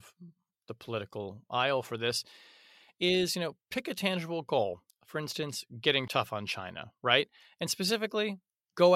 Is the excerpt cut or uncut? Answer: uncut